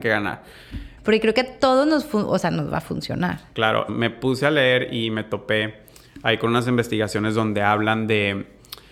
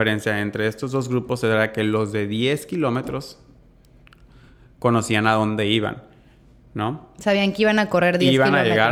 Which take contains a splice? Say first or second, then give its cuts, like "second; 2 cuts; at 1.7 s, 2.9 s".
first; 2 cuts; at 1.0 s, 3.9 s